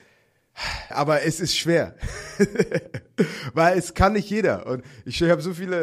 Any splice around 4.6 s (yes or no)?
no